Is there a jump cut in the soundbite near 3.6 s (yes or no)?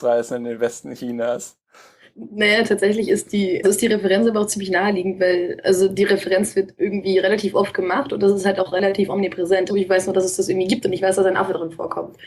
yes